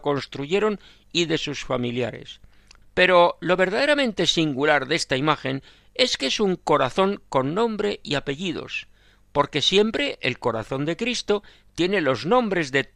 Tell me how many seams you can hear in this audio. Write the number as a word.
one